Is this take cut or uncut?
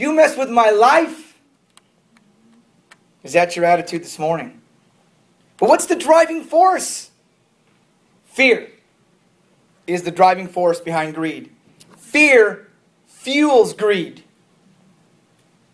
uncut